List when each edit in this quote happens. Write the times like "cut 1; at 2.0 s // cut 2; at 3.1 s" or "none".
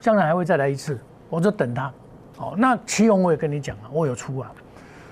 cut 1; at 2.3 s